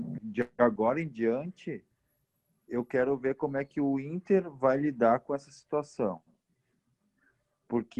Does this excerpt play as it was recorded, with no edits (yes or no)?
yes